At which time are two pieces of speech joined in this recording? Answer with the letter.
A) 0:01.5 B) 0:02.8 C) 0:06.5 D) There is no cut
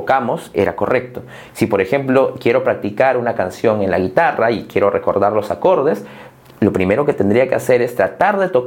A